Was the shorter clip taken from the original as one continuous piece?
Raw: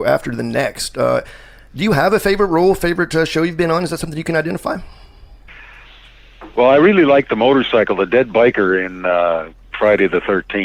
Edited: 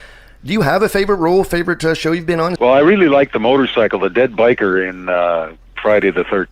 no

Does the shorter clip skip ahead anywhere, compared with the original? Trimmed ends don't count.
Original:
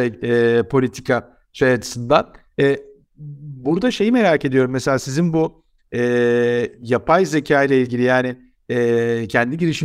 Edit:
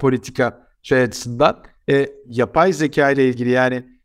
yes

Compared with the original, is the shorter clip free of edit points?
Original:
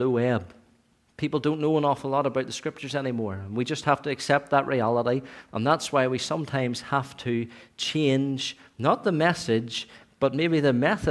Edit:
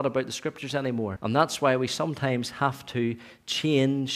no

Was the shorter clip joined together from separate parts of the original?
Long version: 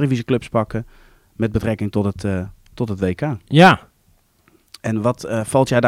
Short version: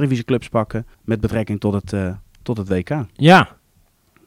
yes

